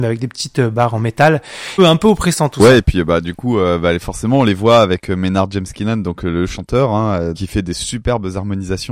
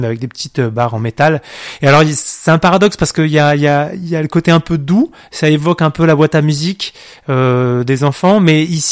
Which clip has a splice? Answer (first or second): first